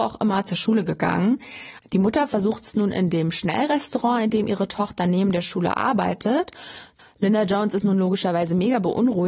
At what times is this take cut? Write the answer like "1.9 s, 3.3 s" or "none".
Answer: 1.8 s, 7.0 s